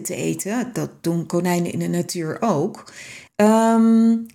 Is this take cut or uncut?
cut